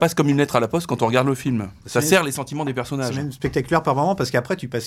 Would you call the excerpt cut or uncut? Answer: uncut